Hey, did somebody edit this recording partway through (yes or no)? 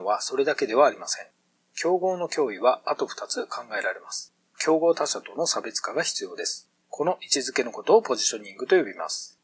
yes